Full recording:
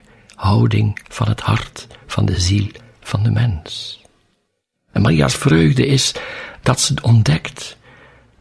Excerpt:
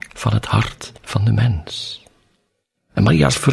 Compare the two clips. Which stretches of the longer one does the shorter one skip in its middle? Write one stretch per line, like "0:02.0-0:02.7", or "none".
0:01.9-0:03.0